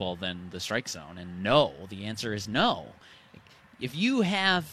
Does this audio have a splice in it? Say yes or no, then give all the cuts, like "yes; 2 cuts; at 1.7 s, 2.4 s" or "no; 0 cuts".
no; 0 cuts